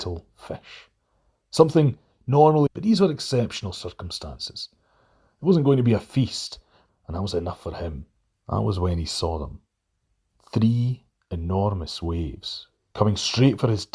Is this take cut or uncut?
cut